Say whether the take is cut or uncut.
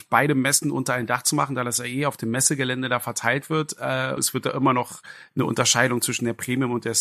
cut